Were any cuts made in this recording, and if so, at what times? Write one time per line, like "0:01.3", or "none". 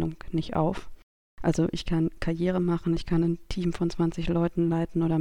0:03.0